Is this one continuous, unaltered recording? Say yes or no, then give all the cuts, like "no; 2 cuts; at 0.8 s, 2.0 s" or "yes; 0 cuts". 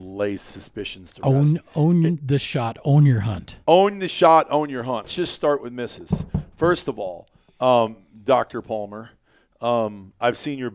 no; 1 cut; at 5.0 s